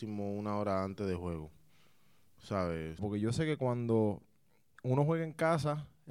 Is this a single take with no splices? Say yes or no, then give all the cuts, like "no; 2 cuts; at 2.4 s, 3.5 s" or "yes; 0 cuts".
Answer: no; 1 cut; at 3.0 s